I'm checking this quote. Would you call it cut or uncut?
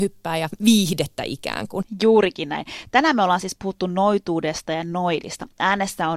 uncut